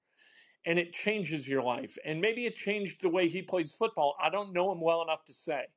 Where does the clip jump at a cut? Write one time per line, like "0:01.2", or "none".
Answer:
0:04.1